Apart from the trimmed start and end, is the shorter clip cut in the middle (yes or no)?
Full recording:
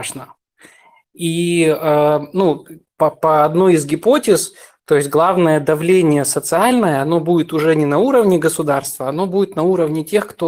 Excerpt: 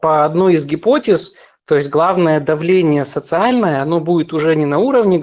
no